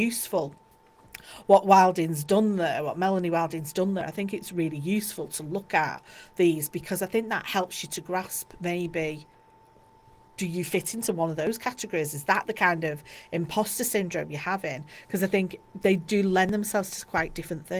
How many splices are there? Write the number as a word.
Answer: zero